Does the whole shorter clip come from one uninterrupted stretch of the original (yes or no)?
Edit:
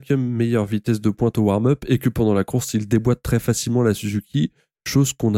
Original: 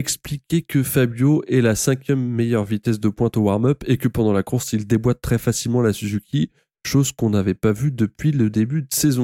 yes